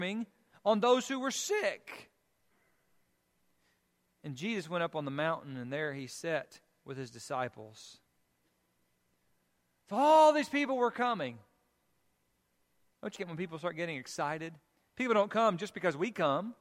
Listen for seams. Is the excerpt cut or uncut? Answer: cut